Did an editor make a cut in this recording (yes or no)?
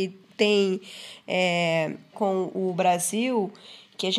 yes